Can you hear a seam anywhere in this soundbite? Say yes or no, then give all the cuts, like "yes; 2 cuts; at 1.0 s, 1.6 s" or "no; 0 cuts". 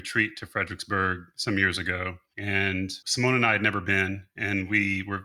no; 0 cuts